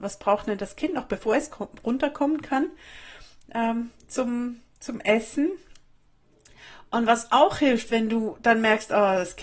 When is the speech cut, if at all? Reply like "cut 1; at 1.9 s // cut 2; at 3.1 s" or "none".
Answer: none